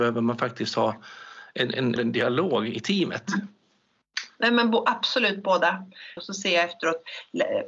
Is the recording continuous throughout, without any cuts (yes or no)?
no